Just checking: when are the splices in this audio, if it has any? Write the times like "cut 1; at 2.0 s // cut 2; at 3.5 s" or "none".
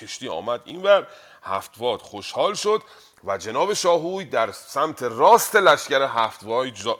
none